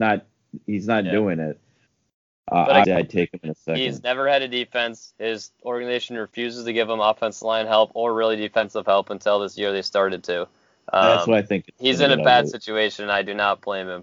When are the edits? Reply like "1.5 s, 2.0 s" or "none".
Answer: 2.8 s